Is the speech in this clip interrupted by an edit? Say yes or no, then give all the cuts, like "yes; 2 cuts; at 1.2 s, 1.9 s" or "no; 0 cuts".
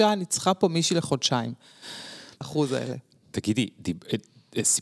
yes; 1 cut; at 2.4 s